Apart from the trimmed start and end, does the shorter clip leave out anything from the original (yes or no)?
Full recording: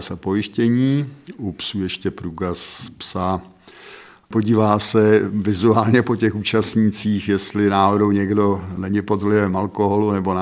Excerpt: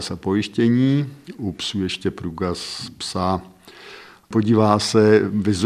no